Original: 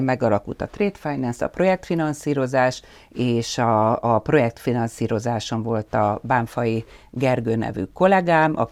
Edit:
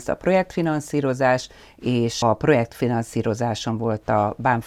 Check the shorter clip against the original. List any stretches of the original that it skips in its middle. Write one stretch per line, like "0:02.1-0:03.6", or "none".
0:03.6-0:04.1